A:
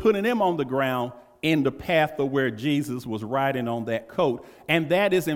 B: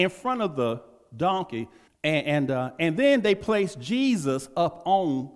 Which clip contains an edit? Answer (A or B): B